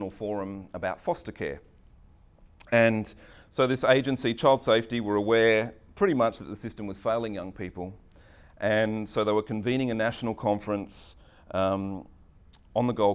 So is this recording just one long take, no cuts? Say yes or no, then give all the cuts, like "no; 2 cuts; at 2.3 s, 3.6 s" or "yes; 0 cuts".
yes; 0 cuts